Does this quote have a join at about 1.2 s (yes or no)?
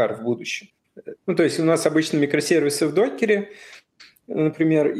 yes